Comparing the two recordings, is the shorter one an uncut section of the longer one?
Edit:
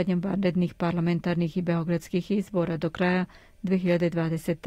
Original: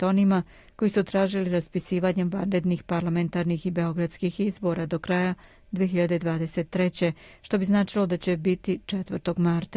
yes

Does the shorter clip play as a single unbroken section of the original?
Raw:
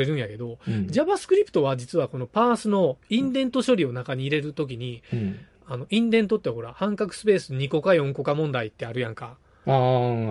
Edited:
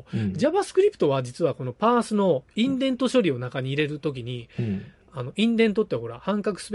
yes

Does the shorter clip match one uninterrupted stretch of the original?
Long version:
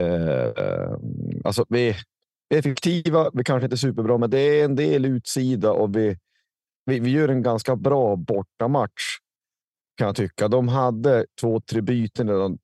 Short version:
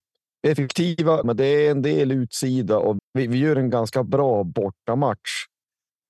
no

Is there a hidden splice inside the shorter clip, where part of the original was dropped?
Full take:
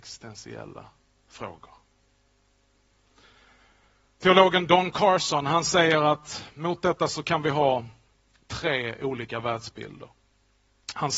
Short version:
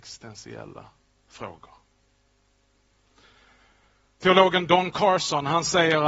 no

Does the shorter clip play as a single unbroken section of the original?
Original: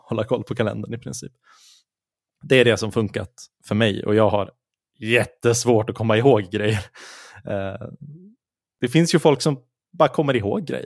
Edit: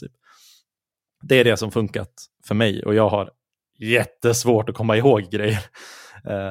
yes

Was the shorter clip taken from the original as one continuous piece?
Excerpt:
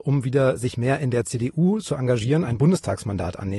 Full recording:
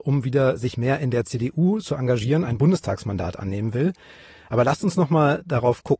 yes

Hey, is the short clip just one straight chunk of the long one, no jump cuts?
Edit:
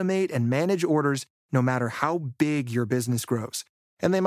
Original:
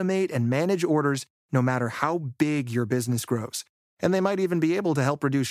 yes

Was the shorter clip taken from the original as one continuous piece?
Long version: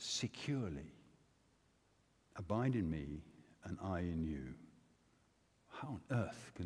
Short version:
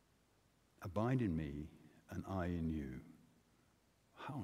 yes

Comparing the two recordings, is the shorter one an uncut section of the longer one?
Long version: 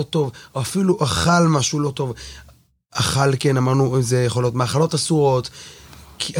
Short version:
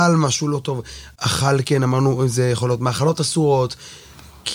no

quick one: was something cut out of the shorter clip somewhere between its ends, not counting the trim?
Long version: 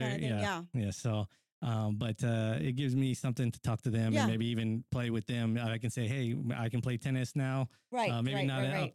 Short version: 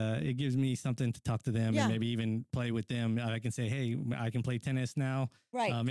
no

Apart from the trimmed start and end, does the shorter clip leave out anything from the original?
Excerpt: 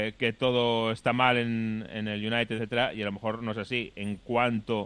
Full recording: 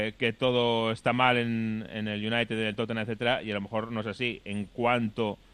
yes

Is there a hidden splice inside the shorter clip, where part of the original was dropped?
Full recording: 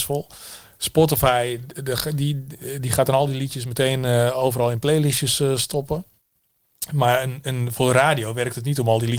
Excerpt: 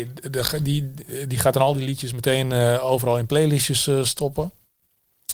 no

